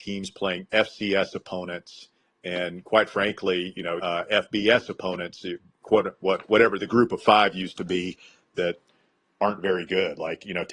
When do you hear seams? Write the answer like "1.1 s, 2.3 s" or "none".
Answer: 4.0 s